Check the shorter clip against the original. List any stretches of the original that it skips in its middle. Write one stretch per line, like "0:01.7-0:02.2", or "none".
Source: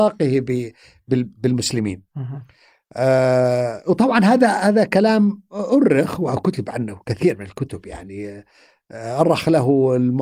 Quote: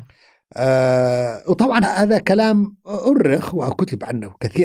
0:04.2-0:04.5